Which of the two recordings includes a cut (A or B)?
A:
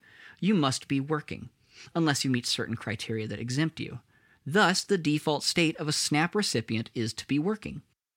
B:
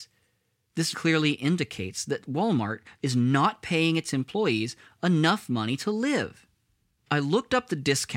B